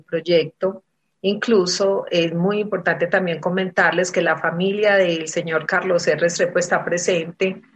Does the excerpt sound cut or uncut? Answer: uncut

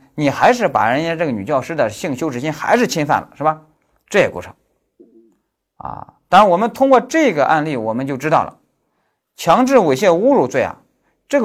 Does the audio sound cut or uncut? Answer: uncut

